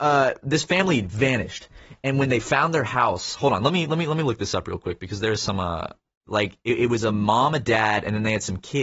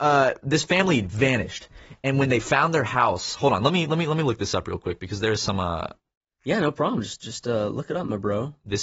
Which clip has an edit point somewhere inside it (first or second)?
first